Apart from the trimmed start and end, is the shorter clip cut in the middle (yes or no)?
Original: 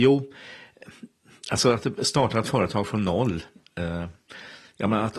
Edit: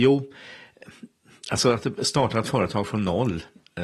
no